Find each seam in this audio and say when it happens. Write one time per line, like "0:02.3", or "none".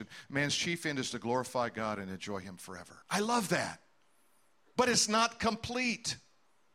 0:03.0